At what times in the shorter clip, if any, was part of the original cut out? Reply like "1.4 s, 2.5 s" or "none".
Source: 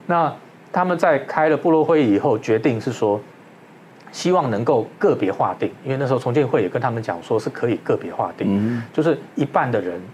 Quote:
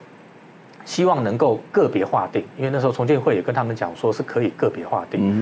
none